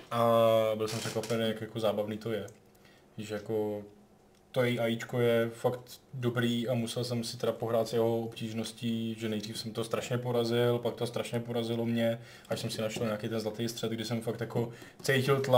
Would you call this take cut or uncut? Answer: uncut